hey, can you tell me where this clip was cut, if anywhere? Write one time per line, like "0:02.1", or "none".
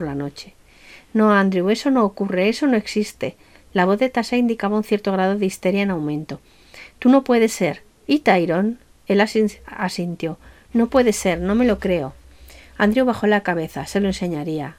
none